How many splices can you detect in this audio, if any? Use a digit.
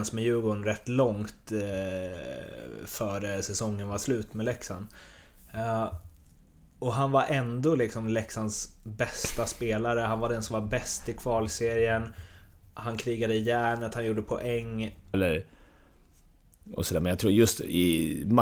1